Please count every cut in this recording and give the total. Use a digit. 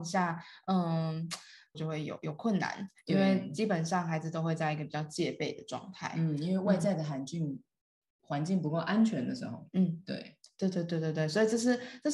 1